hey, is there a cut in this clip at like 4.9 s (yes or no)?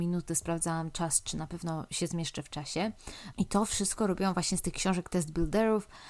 no